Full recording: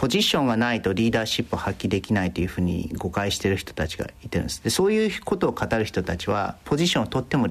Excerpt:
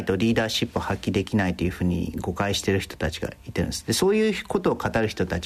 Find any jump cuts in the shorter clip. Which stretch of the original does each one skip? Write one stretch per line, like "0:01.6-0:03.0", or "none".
none